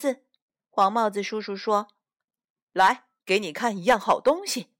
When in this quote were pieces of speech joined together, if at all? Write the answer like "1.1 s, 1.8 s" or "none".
3.2 s